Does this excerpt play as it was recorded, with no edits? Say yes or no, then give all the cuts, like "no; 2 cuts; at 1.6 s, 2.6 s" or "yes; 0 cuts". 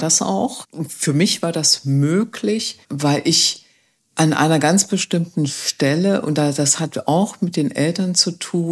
yes; 0 cuts